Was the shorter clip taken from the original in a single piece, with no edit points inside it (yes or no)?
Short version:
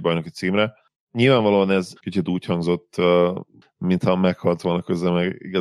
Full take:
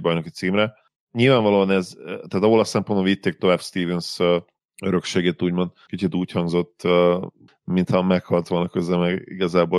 no